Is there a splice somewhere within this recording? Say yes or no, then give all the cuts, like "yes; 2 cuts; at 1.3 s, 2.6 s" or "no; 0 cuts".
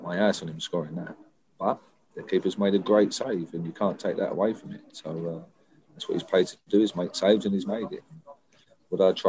no; 0 cuts